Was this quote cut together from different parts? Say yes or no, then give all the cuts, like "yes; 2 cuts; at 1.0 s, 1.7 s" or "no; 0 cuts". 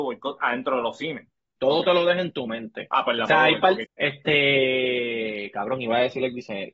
yes; 2 cuts; at 1.6 s, 3.8 s